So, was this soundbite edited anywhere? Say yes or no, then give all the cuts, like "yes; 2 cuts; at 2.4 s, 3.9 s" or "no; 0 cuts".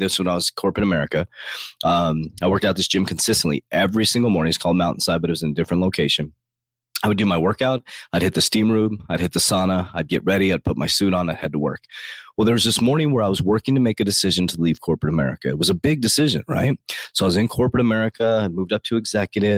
no; 0 cuts